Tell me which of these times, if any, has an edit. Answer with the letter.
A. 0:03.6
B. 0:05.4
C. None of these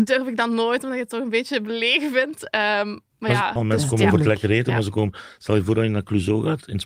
A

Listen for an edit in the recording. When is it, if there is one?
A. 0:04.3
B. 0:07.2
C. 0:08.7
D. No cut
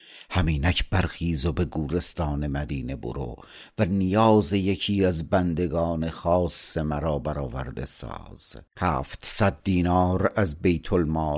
C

